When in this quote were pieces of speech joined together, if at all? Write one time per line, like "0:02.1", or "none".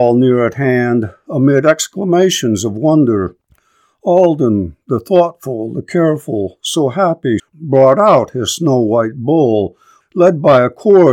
0:07.4
0:10.0